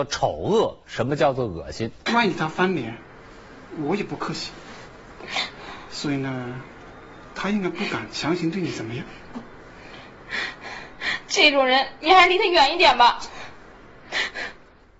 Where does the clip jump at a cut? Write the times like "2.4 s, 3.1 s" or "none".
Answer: 2.1 s